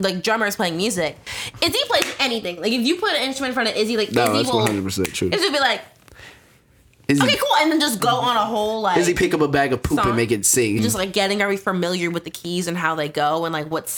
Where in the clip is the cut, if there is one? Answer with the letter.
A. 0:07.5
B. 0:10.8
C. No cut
B